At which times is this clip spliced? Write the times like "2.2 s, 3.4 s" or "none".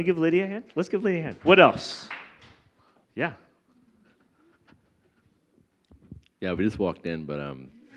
1.4 s, 3.0 s